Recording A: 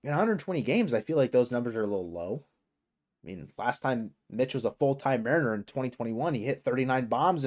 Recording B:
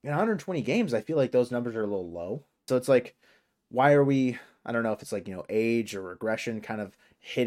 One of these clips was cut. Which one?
B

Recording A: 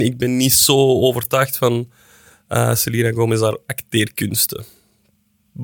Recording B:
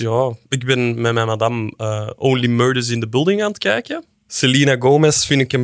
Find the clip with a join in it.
B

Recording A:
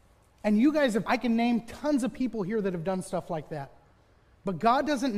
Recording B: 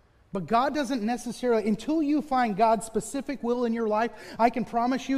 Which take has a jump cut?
A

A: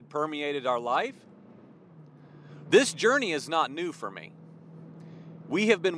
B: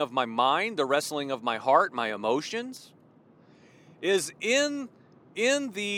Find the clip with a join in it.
A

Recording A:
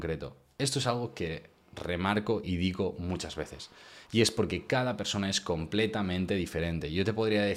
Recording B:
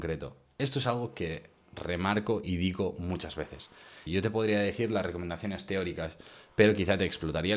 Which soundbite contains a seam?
B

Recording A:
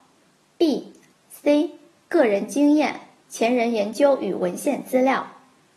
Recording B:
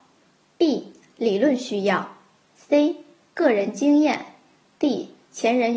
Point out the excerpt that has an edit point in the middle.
A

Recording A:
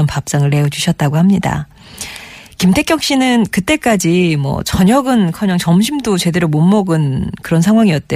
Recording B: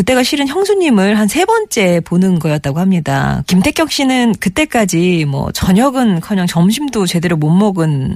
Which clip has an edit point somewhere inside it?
B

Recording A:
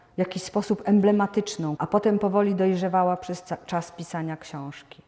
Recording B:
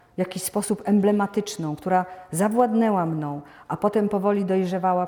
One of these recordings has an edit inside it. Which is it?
A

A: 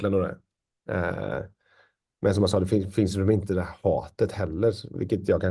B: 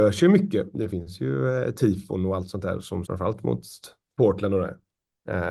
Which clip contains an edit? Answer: B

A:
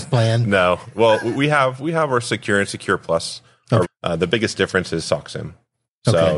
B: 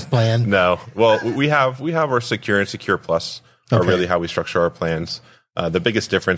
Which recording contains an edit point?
A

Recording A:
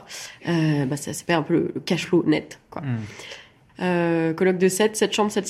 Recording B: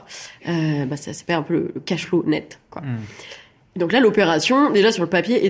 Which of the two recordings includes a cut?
A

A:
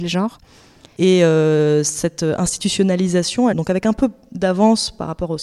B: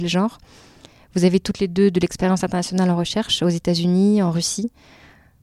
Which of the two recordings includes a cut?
A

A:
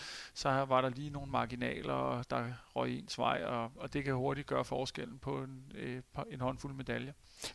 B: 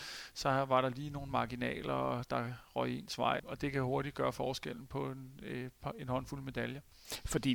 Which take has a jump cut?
B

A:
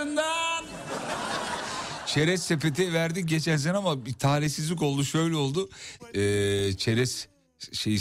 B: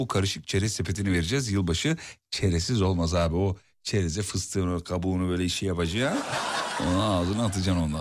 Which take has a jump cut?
A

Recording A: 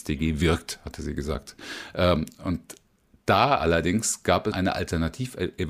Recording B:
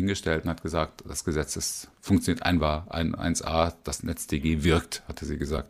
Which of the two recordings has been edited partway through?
A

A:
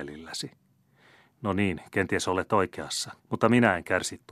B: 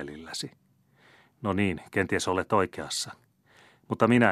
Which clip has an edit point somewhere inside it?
A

